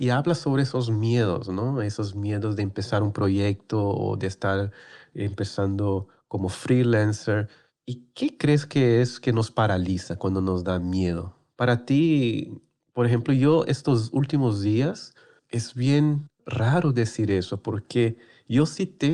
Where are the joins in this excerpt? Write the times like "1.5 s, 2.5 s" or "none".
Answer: none